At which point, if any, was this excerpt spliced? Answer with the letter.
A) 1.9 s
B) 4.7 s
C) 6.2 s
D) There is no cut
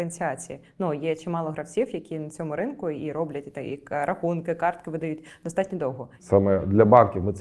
C